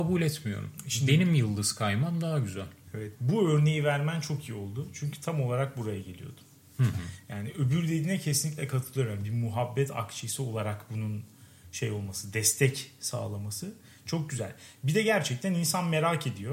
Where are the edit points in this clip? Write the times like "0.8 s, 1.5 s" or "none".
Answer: none